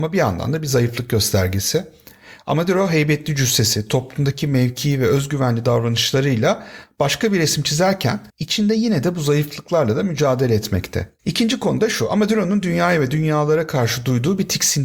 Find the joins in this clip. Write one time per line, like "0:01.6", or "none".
0:08.3
0:11.2